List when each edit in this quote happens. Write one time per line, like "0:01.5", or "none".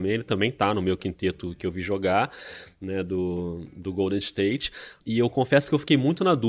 0:05.0